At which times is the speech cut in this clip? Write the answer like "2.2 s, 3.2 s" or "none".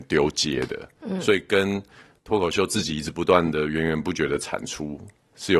none